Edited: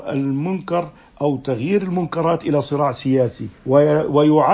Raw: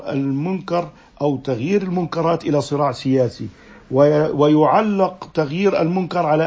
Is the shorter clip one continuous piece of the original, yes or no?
no